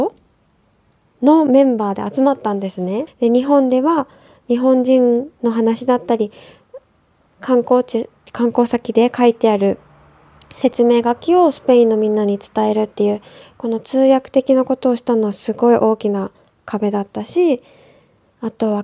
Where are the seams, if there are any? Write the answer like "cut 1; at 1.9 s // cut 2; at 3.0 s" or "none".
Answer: cut 1; at 3.1 s